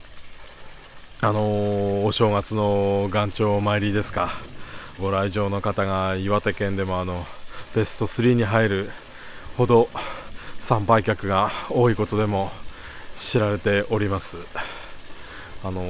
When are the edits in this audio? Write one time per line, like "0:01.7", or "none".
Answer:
0:05.0